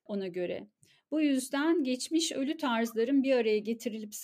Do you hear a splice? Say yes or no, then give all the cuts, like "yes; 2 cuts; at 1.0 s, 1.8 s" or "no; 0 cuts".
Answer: no; 0 cuts